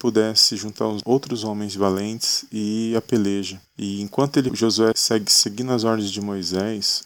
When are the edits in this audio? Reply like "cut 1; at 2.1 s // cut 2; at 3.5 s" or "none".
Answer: none